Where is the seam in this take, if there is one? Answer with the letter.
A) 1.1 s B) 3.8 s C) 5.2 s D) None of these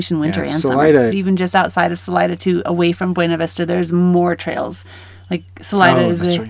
A